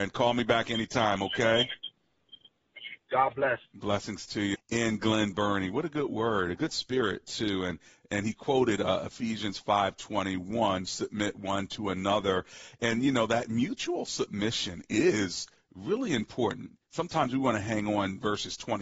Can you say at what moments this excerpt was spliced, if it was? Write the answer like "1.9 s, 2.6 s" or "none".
4.5 s